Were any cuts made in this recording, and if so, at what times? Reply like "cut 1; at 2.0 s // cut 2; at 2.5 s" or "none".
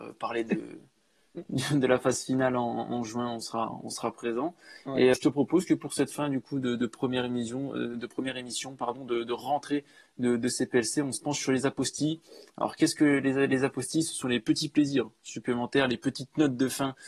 cut 1; at 5.1 s